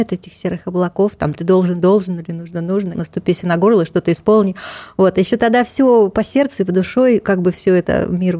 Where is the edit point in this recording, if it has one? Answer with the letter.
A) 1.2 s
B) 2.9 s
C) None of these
B